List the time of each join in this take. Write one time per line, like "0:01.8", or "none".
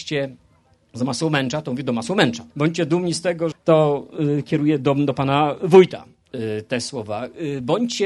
0:02.5
0:03.5